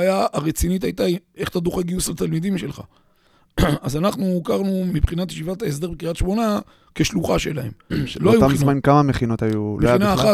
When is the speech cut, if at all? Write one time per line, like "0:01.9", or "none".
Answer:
0:04.9
0:07.9